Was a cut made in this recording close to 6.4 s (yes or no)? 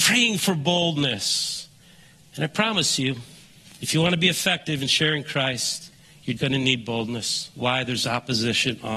yes